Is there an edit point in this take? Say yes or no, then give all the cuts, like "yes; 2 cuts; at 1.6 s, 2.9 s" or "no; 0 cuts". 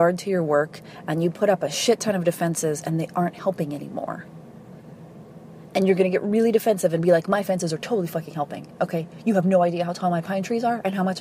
no; 0 cuts